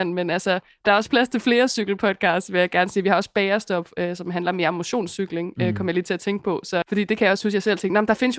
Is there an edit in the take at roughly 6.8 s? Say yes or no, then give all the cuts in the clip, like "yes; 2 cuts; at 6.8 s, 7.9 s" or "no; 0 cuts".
yes; 1 cut; at 6.8 s